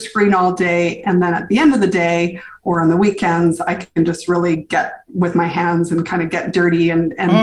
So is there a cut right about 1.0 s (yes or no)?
no